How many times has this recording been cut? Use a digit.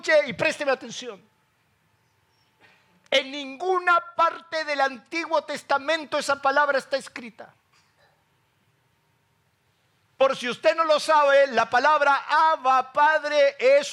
0